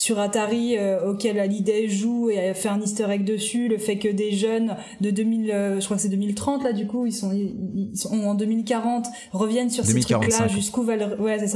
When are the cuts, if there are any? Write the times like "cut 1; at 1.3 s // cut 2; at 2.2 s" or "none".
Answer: none